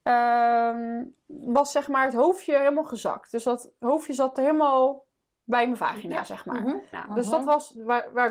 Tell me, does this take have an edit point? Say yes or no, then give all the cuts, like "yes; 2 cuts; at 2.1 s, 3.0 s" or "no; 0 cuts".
yes; 1 cut; at 6.9 s